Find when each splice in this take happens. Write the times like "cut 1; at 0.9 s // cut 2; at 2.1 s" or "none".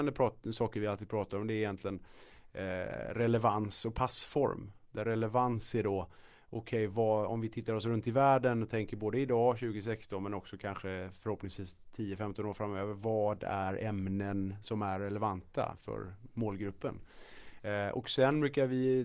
cut 1; at 17.6 s